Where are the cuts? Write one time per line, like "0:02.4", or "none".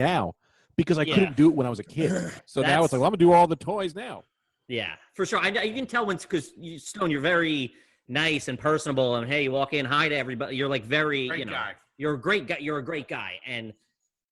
0:02.4